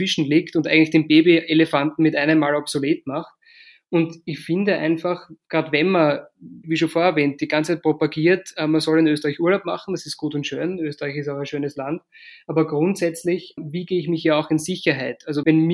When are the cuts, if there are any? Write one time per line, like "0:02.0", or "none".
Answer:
none